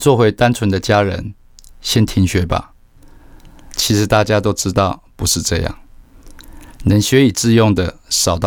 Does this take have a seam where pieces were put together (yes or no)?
yes